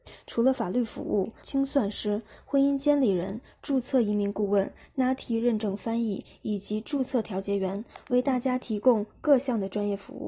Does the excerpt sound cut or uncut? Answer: cut